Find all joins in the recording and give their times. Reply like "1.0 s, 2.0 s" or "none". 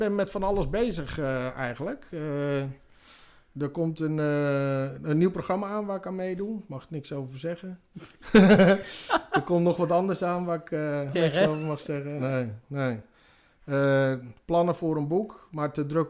11.1 s